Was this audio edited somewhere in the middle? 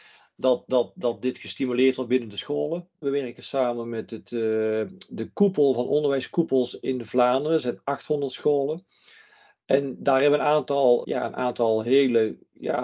yes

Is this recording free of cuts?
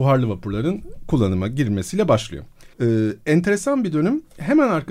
no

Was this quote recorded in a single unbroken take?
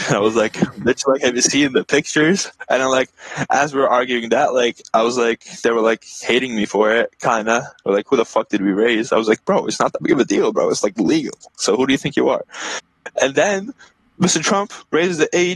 yes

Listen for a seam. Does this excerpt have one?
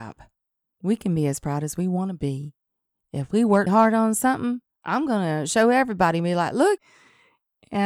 yes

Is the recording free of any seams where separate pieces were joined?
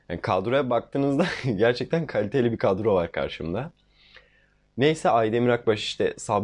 yes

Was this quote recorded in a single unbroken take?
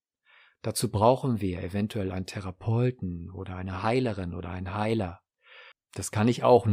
no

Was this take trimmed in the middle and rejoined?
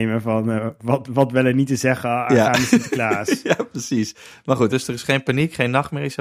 yes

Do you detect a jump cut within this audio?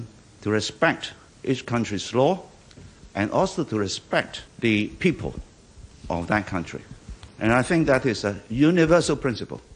no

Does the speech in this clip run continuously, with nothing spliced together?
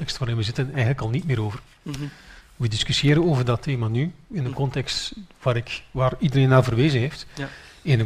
yes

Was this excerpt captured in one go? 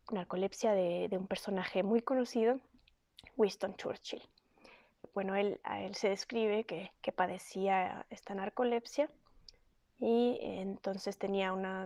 no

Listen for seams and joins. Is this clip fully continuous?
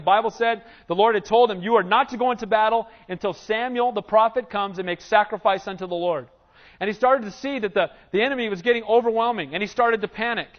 yes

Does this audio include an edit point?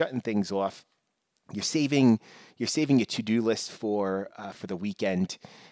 no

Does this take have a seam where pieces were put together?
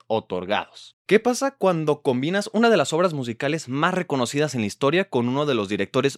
yes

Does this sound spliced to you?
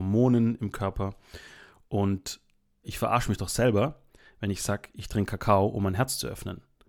yes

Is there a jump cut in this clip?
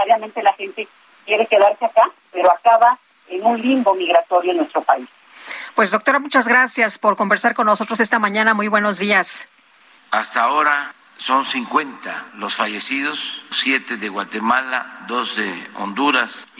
yes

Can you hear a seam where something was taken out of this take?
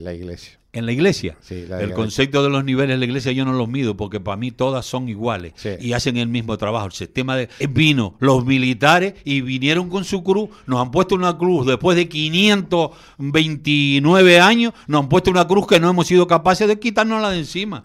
yes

